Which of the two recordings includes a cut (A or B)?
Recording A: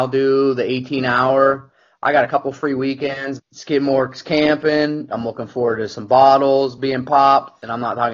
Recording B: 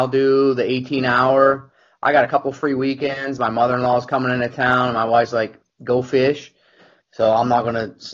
A